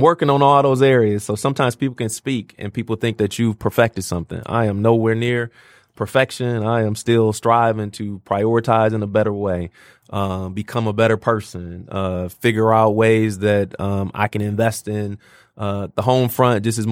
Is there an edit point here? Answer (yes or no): no